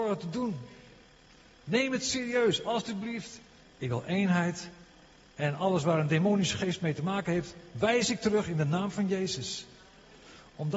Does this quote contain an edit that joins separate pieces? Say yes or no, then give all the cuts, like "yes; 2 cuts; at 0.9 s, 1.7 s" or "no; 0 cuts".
yes; 2 cuts; at 1.6 s, 3.6 s